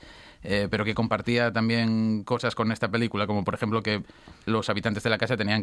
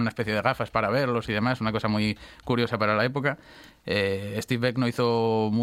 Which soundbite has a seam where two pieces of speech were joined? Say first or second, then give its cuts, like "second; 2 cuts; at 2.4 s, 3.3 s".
second; 1 cut; at 3.7 s